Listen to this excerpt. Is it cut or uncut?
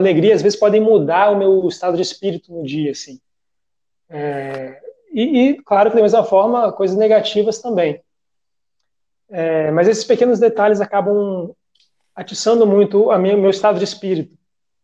uncut